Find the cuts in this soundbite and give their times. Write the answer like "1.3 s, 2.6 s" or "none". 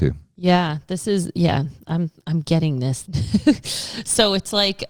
3.0 s